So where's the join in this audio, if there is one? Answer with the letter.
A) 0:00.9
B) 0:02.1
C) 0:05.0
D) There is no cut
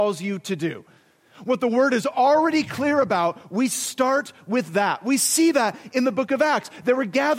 D